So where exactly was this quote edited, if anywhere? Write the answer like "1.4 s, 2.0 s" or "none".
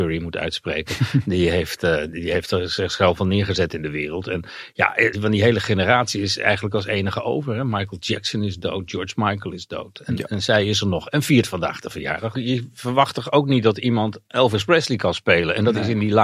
5.1 s, 12.3 s